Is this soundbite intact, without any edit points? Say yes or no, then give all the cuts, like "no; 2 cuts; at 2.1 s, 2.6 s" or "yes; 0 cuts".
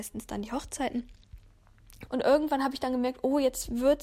no; 1 cut; at 2.1 s